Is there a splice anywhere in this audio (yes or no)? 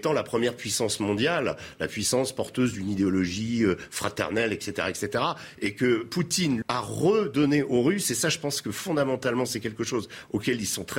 yes